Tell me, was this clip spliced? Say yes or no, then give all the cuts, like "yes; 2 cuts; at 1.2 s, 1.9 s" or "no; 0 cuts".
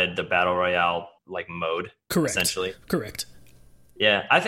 yes; 1 cut; at 1.2 s